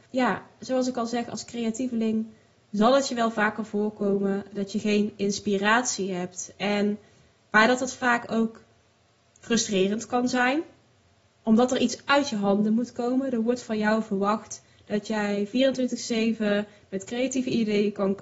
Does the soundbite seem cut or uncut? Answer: uncut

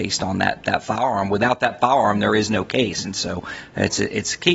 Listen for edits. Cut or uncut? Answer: uncut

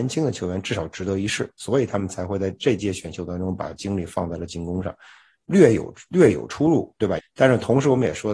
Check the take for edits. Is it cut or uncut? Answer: cut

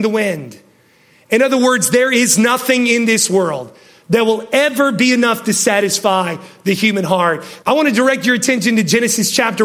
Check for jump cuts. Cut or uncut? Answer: cut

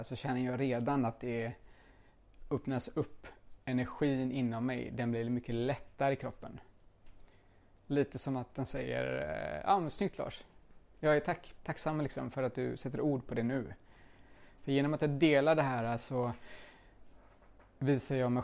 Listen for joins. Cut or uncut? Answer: cut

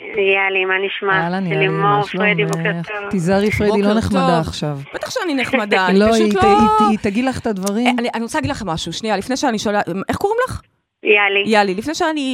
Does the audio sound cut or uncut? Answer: uncut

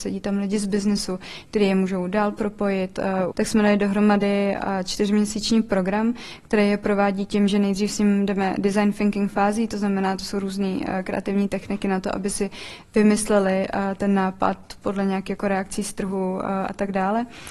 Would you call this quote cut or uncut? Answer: cut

